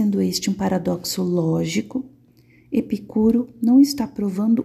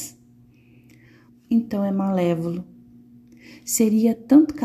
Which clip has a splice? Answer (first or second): second